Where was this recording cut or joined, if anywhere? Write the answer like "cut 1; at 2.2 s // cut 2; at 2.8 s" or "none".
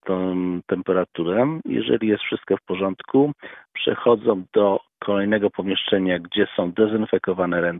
none